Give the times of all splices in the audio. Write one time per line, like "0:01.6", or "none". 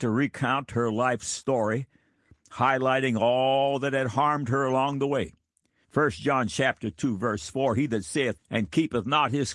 0:05.8
0:08.4